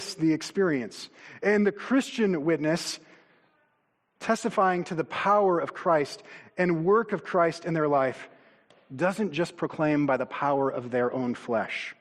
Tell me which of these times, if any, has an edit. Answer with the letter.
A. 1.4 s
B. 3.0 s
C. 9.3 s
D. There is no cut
D